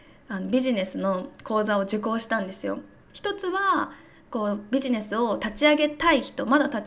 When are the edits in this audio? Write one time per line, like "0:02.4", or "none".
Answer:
0:03.1